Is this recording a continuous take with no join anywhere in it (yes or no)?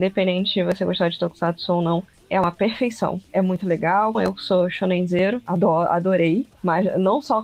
no